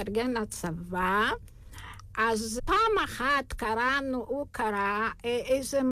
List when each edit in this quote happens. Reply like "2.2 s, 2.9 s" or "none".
2.6 s